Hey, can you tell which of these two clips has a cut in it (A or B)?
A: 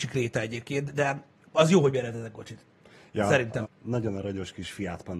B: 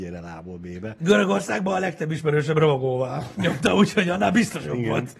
A